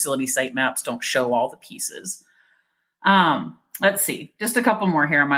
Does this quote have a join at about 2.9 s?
no; 0 cuts

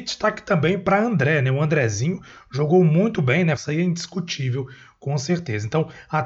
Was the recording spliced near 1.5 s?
no; 1 cut; at 3.6 s

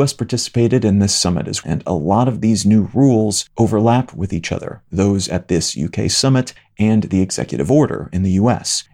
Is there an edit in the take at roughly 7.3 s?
no; 1 cut; at 1.6 s

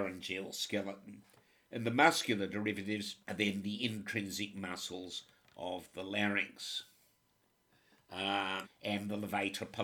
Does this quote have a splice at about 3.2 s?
yes; 2 cuts; at 3.2 s, 8.6 s

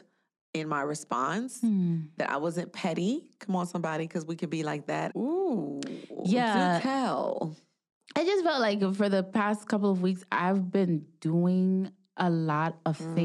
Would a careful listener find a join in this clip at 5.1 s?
yes; 1 cut; at 5.1 s

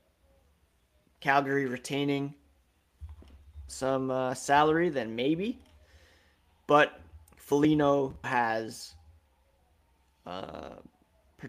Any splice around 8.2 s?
yes; 2 cuts; at 3.7 s, 8.2 s

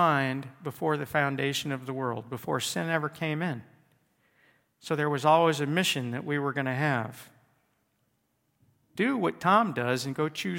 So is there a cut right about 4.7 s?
no; 1 cut; at 9.0 s

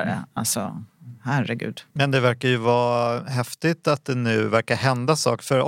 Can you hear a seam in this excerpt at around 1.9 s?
yes; 1 cut; at 1.9 s

